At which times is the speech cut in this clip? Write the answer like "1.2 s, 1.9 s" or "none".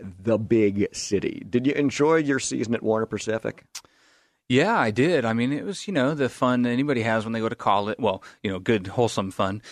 none